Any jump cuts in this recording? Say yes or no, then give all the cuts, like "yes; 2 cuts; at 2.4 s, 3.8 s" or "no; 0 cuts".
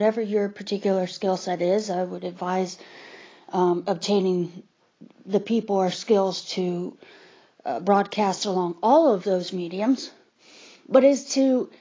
no; 0 cuts